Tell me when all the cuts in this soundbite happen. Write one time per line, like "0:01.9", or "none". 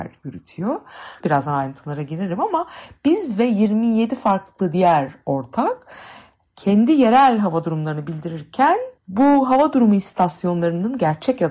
0:01.2
0:09.0